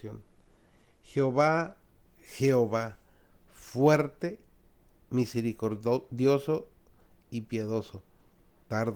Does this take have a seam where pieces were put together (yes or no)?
no